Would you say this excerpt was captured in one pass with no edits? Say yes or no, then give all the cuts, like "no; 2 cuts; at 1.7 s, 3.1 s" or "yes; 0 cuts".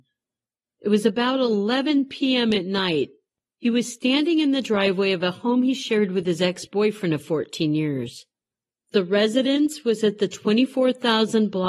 yes; 0 cuts